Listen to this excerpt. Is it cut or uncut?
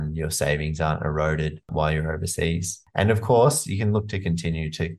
uncut